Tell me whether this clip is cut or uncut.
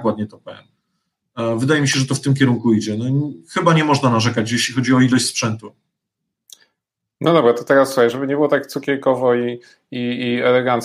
uncut